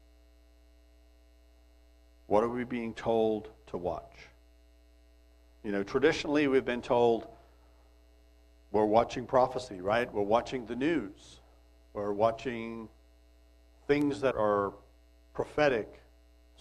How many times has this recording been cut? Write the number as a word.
one